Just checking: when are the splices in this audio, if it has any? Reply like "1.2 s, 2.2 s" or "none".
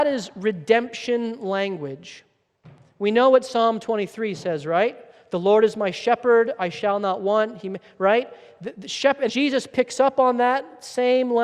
9.3 s

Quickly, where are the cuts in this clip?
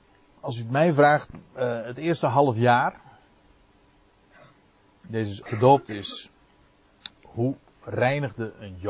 5.4 s, 7.1 s

